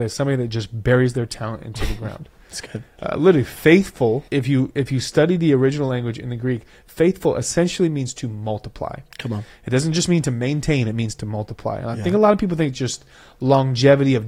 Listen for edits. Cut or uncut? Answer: cut